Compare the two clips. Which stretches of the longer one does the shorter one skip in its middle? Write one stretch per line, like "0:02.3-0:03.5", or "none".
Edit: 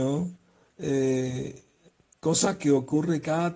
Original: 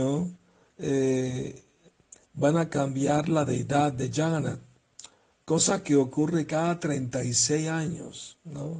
0:02.1-0:05.3